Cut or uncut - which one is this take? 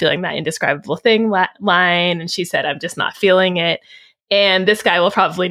uncut